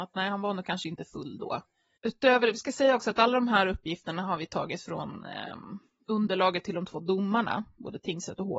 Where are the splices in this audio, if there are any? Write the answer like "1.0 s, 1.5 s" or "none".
2.0 s